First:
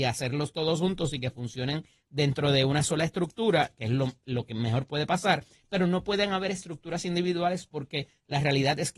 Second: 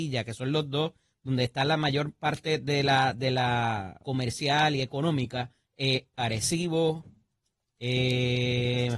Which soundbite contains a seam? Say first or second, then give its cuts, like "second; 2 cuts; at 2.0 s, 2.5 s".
second; 2 cuts; at 4.0 s, 6.1 s